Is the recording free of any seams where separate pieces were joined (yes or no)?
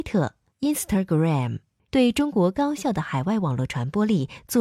no